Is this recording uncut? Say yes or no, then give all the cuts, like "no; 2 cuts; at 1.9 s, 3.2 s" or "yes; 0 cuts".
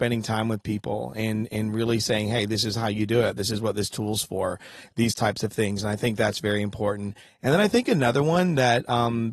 yes; 0 cuts